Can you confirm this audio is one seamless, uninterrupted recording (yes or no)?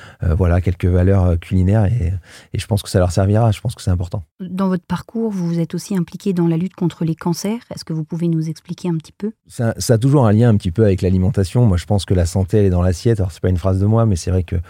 yes